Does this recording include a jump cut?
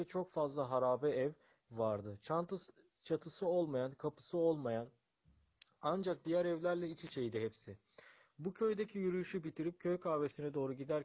no; 0 cuts

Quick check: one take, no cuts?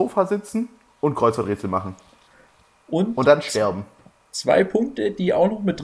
yes; 0 cuts

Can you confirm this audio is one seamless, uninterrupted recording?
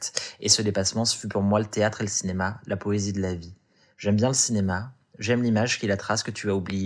yes; 0 cuts

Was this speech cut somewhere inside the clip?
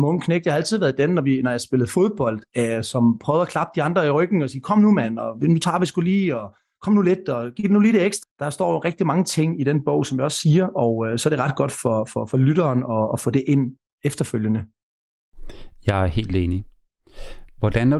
yes; 1 cut; at 8.2 s

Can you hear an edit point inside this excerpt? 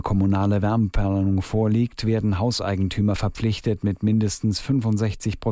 no; 0 cuts

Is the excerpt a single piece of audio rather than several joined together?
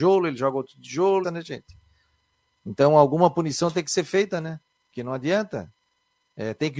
no; 1 cut; at 1.2 s

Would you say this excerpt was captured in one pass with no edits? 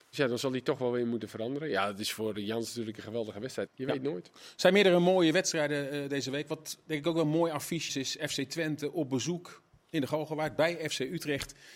no; 2 cuts; at 3.7 s, 7.9 s

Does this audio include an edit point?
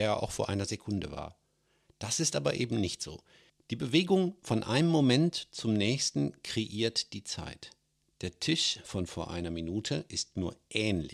yes; 1 cut; at 3.5 s

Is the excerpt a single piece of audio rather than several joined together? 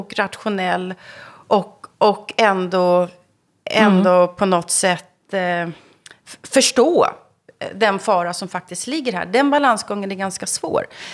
yes; 0 cuts

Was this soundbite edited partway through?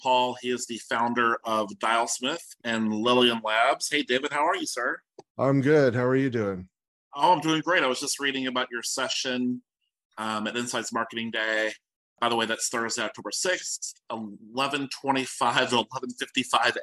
no; 0 cuts

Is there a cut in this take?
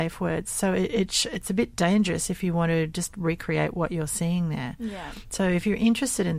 no; 0 cuts

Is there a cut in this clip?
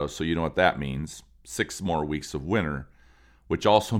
no; 0 cuts

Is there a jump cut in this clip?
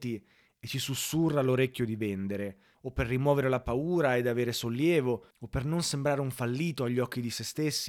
yes; 2 cuts; at 2.7 s, 5.3 s

